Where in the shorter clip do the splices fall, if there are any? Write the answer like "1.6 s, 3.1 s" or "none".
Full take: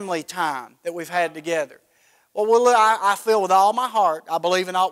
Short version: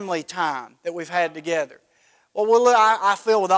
none